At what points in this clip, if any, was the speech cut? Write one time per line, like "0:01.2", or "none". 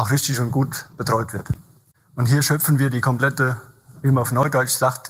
0:01.9
0:04.0